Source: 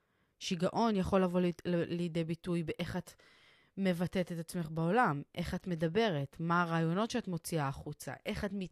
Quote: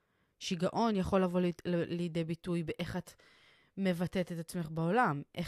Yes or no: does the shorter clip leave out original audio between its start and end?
no